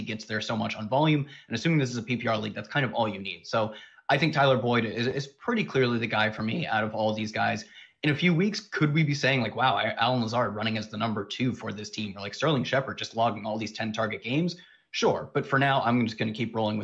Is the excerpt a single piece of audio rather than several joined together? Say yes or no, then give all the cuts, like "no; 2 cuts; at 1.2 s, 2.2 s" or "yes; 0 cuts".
yes; 0 cuts